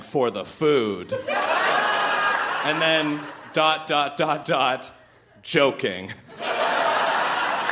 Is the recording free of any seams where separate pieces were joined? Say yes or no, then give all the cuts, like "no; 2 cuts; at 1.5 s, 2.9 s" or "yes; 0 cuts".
no; 1 cut; at 4.4 s